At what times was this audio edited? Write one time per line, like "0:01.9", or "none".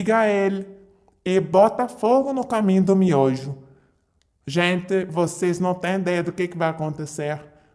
none